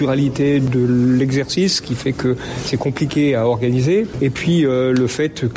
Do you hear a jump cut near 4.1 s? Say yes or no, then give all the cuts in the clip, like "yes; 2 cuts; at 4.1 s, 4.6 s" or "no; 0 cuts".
no; 0 cuts